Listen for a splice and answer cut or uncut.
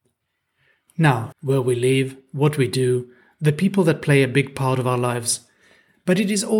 cut